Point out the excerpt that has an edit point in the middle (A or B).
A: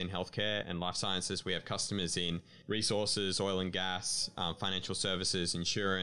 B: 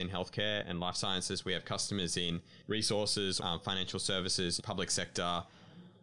B